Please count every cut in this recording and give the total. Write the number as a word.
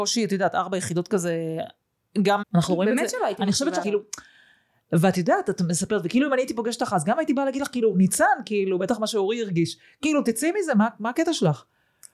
two